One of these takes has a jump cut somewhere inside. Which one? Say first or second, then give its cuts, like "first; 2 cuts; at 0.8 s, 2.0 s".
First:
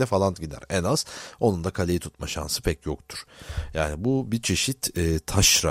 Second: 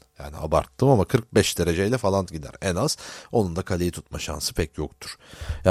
first; 1 cut; at 3.7 s